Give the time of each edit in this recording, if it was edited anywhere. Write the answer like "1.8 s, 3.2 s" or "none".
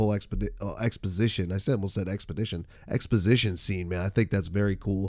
2.8 s